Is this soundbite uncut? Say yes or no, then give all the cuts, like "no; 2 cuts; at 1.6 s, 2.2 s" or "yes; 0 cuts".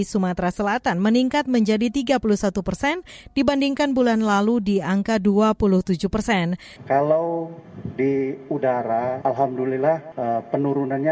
no; 2 cuts; at 6.8 s, 9.2 s